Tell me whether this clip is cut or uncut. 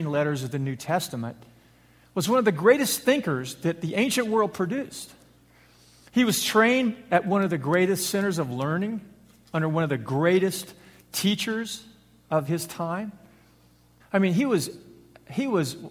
cut